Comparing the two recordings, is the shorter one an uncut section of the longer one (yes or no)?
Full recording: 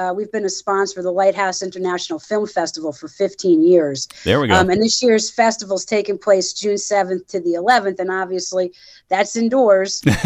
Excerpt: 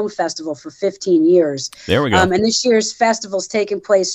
yes